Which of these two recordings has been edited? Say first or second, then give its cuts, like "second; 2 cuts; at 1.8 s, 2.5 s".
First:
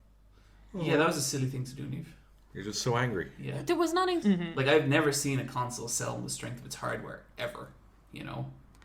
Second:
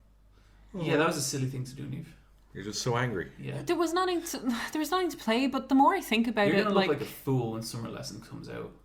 first; 1 cut; at 4.2 s